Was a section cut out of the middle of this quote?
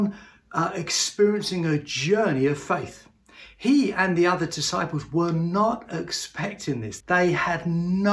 yes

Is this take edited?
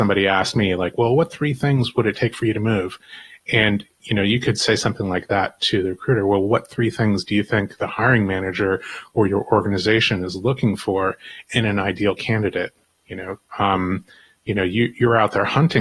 no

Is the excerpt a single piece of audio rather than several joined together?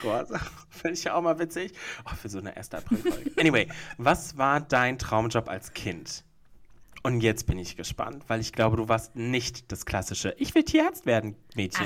yes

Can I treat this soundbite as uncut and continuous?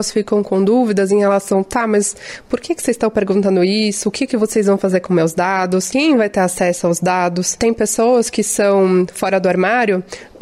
yes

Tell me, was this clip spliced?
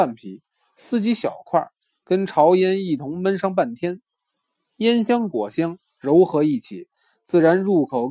no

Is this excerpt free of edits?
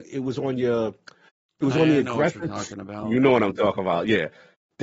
yes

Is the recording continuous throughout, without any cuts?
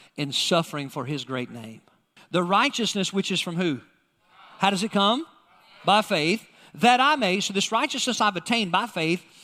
no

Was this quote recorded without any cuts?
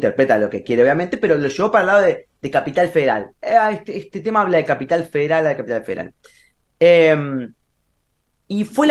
yes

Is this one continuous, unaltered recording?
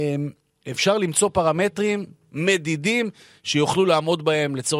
yes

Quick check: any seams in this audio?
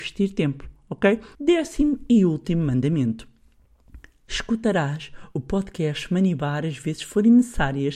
yes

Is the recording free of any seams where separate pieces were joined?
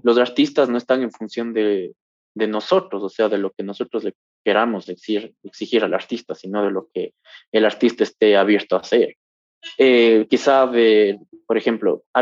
yes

